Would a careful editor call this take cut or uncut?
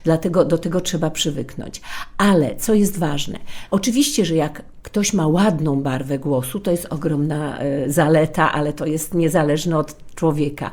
cut